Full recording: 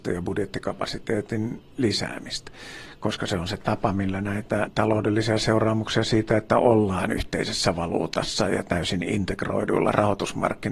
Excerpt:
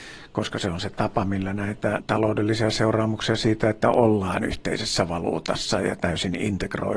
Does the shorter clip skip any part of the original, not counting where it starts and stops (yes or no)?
no